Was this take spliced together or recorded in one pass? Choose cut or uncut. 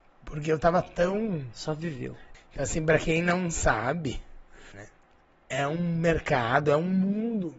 cut